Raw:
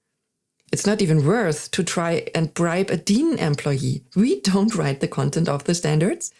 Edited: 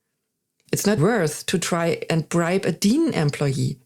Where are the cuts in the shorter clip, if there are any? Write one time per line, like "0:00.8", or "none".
0:01.0